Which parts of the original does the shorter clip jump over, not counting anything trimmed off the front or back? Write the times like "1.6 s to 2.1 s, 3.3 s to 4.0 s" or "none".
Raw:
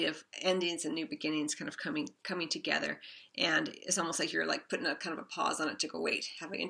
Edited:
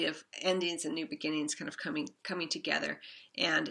none